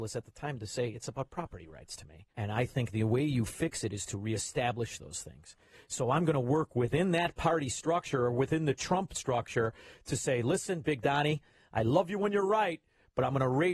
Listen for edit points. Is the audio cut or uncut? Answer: cut